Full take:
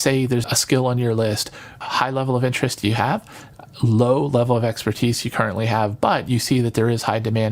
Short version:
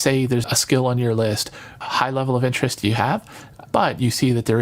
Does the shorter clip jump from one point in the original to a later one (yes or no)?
yes